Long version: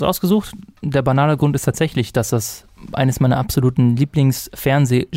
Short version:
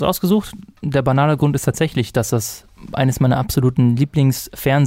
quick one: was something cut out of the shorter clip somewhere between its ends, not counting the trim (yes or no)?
no